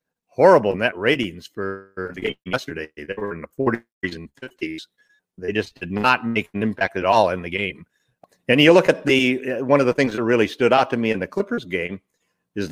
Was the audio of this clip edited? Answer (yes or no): no